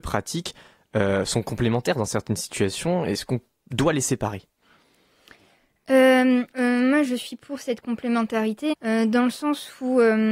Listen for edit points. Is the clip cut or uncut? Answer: cut